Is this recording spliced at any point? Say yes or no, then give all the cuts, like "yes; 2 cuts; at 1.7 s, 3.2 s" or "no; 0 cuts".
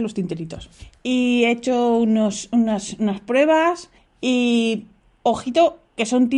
no; 0 cuts